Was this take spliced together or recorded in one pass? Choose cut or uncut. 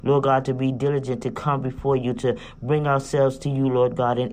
uncut